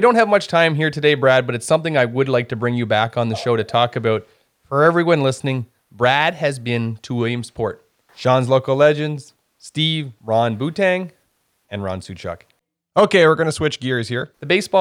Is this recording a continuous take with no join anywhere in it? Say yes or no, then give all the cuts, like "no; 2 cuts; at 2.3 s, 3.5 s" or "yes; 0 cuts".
no; 1 cut; at 8.1 s